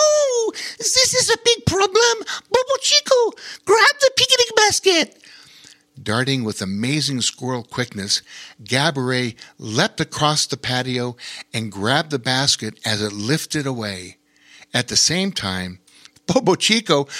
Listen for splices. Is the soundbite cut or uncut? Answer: uncut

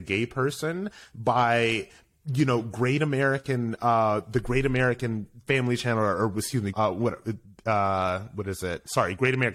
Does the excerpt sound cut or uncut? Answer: cut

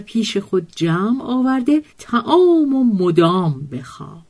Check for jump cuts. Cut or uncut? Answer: cut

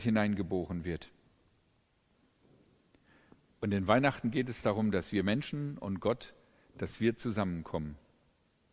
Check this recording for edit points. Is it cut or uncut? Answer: uncut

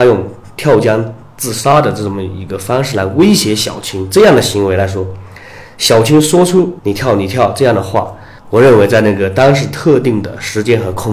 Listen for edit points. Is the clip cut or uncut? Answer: uncut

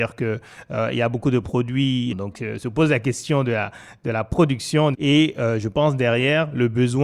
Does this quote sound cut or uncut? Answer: cut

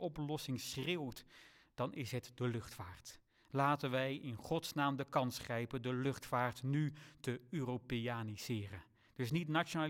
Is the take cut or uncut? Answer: uncut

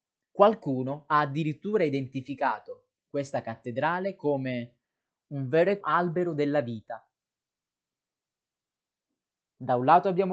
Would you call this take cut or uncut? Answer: cut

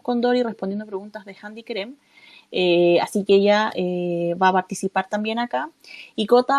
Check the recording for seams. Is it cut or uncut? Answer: uncut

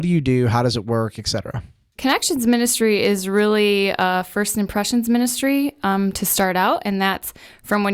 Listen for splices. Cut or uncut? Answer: uncut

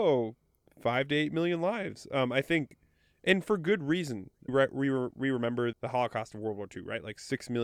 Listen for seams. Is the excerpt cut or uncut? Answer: cut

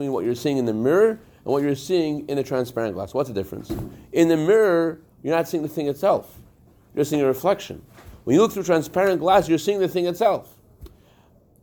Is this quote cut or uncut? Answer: uncut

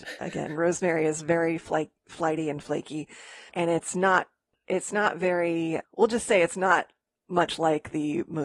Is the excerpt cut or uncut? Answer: cut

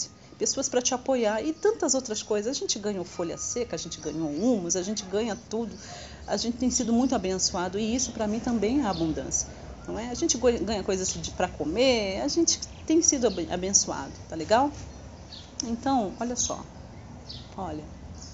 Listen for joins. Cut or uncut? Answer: uncut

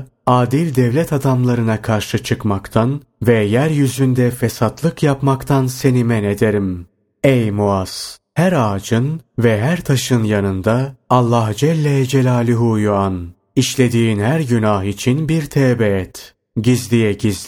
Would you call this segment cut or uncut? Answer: uncut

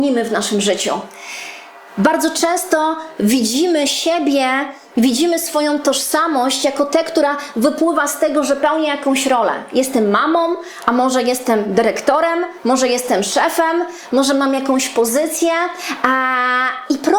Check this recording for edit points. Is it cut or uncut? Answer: cut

